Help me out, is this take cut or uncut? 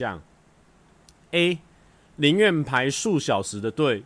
uncut